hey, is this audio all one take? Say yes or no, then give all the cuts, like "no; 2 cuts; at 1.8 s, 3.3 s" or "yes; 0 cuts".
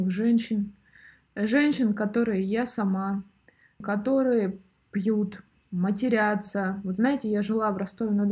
no; 1 cut; at 3.8 s